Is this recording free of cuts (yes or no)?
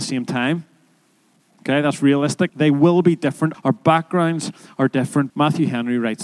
no